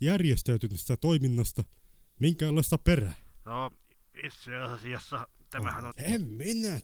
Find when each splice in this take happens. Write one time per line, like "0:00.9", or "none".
0:05.9

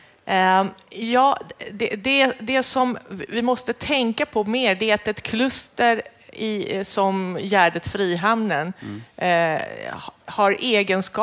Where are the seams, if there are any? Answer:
none

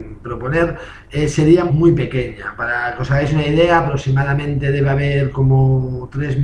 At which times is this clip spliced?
0:01.7

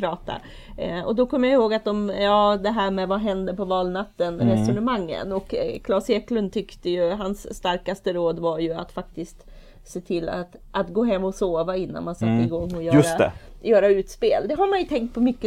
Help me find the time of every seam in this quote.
none

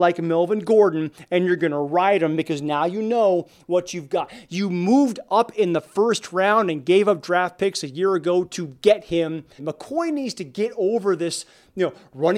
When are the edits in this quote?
0:09.6

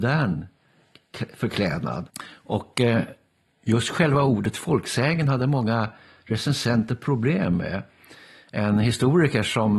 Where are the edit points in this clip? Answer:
none

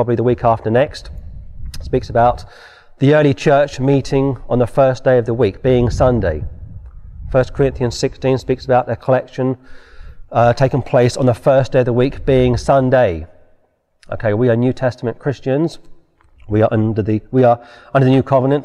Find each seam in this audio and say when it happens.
none

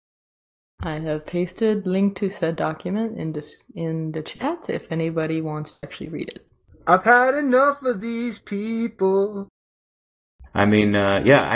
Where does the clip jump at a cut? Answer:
0:06.7
0:10.5

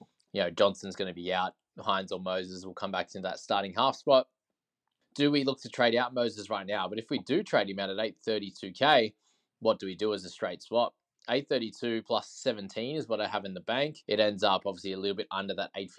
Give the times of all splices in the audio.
0:05.0
0:14.0

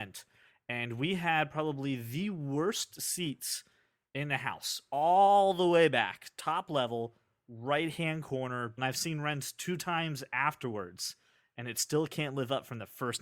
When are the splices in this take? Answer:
0:08.8

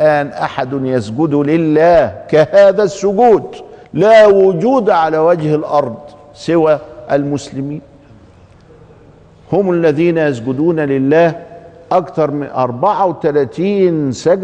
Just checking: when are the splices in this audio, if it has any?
0:03.8

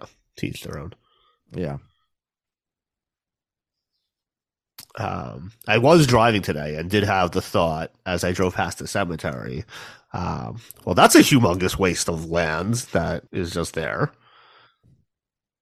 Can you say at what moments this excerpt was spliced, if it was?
0:13.3

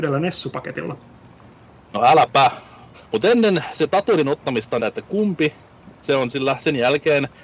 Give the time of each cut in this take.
0:02.9
0:04.8

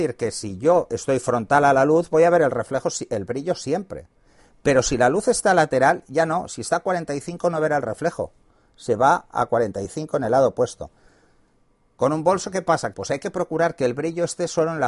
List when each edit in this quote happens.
0:12.9

